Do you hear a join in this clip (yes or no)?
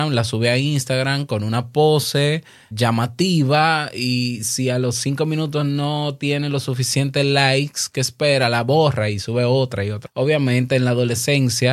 yes